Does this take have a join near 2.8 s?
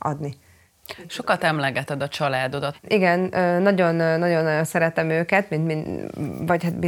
yes; 1 cut; at 2.8 s

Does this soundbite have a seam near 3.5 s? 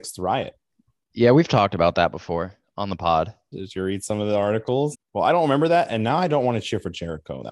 yes; 2 cuts; at 3.5 s, 4.9 s

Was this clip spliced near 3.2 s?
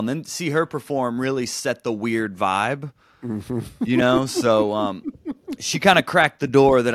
no; 0 cuts

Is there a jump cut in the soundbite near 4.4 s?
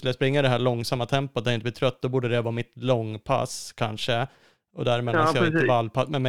no; 0 cuts

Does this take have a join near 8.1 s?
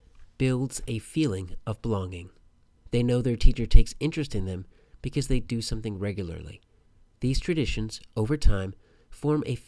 no; 1 cut; at 2.8 s

